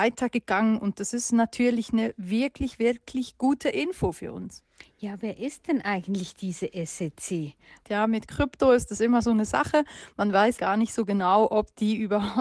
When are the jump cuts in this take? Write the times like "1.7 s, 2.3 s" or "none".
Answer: 7.8 s, 10.6 s